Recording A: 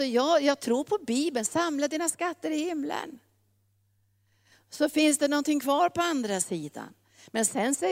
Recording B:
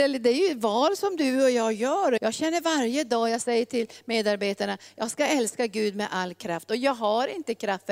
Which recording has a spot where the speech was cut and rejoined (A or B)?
B